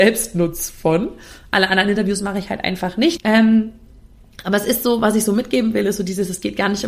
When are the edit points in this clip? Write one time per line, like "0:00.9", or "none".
0:03.2